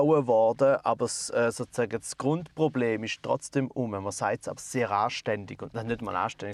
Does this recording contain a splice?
yes; 1 cut; at 4.6 s

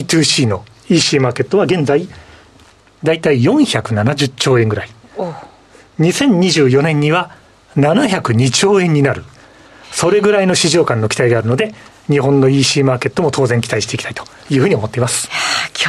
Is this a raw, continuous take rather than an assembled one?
yes; 0 cuts

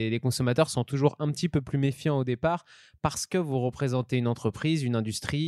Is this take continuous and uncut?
yes; 0 cuts

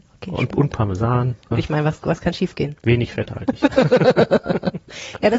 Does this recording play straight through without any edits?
no; 1 cut; at 1.5 s

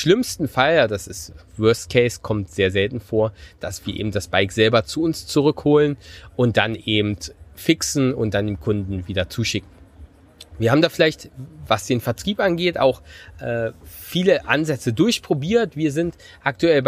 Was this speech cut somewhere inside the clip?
no; 0 cuts

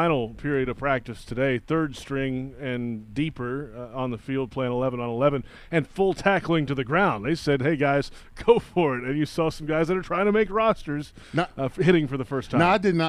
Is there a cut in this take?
no; 0 cuts

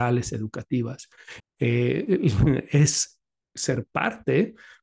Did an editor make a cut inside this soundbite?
yes; 1 cut; at 1.4 s

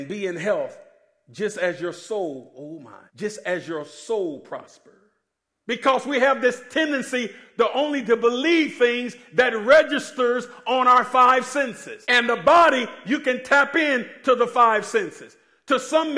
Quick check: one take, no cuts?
no; 3 cuts; at 3.1 s, 5.5 s, 12.0 s

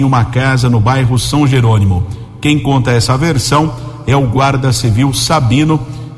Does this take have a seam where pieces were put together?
no; 0 cuts

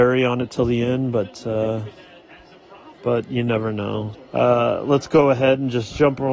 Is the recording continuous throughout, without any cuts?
no; 2 cuts; at 2.9 s, 4.1 s

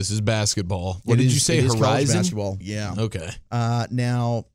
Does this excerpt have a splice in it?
yes; 1 cut; at 2.6 s

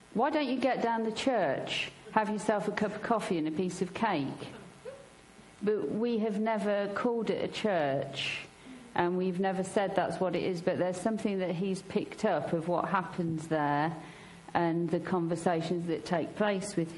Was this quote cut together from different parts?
no; 0 cuts

